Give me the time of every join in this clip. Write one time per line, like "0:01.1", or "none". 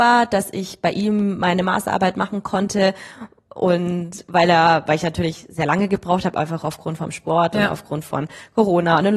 none

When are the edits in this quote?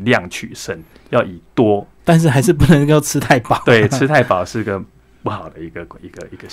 0:02.0

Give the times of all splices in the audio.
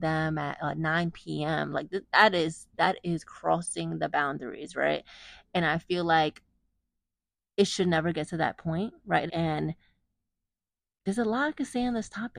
0:09.3

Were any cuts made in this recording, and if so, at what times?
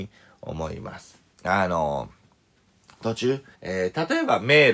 0:01.3
0:03.5

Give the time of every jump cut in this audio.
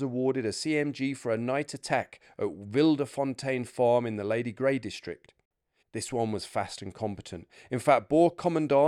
0:05.8

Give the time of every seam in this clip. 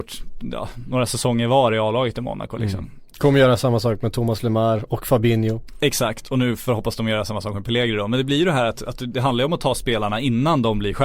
none

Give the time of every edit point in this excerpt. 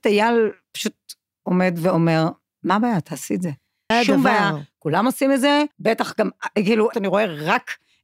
0:03.9
0:05.7
0:06.9

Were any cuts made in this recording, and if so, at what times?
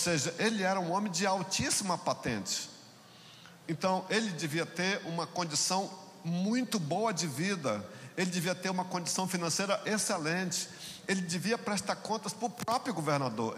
0:03.6

